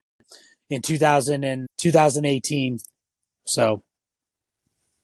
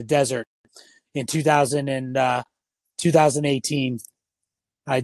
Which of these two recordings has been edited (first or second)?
first